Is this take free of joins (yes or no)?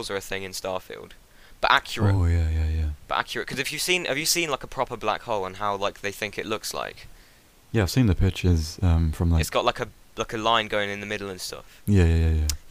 yes